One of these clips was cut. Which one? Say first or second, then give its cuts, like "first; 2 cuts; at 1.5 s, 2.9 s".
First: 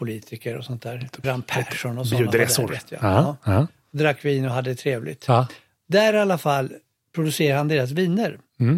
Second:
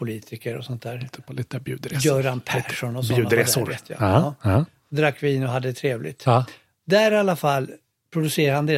first; 1 cut; at 1.2 s